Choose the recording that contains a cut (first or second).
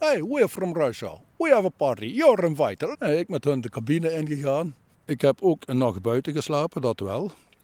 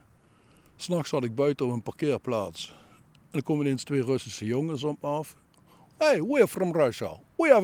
first